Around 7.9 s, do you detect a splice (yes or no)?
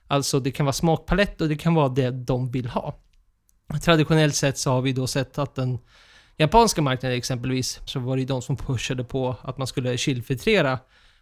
yes